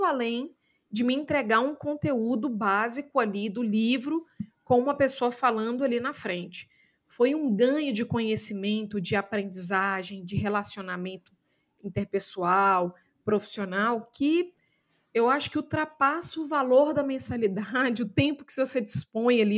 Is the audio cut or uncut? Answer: uncut